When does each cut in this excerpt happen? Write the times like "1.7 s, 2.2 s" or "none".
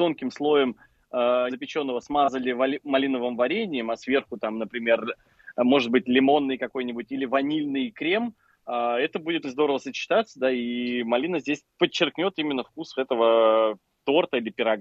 1.5 s, 9.4 s, 13.0 s